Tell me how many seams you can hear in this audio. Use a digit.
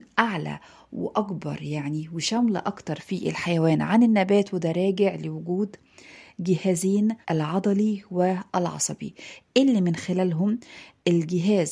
1